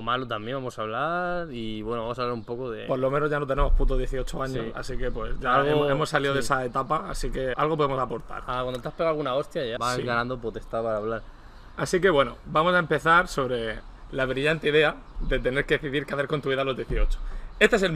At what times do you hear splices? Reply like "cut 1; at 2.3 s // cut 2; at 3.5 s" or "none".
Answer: cut 1; at 7.5 s // cut 2; at 9.8 s